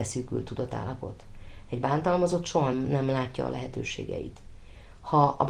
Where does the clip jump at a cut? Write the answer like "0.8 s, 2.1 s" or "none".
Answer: 2.7 s